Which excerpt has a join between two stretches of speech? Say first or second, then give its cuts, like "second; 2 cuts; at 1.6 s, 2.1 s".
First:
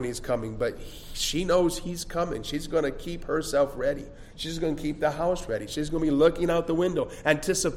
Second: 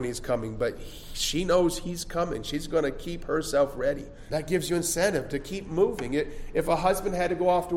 second; 1 cut; at 4.3 s